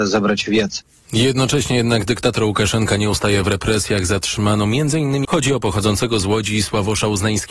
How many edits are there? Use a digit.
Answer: 1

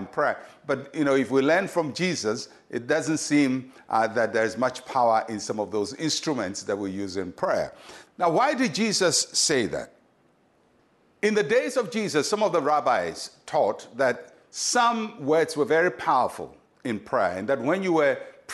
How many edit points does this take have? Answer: 1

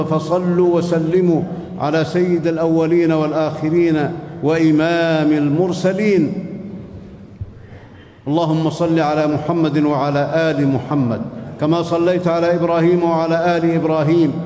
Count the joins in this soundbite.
0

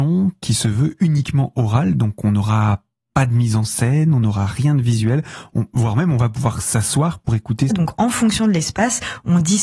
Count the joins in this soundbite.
1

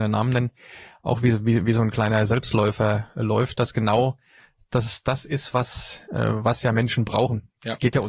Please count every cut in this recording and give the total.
0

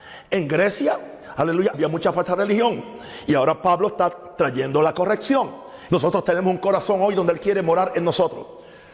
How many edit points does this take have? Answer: 2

